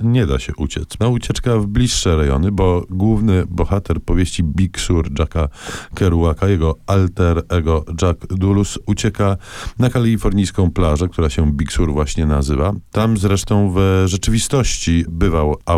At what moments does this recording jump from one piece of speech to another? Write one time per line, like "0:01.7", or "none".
0:01.0